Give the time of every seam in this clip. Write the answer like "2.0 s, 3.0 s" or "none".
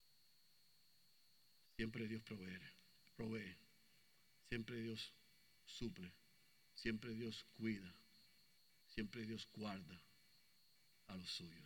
none